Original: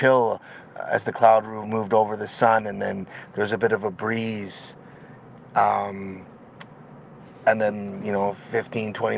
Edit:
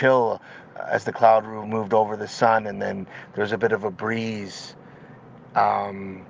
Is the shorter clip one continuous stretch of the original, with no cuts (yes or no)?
yes